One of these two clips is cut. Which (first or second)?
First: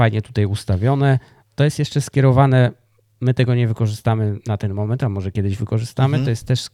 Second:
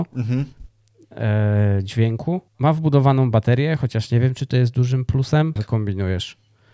second